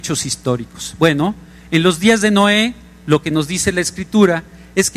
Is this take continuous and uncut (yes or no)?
yes